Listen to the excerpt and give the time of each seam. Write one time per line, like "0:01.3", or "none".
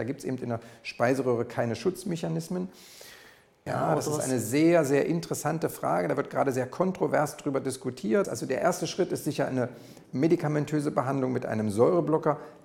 0:03.7
0:08.2
0:10.0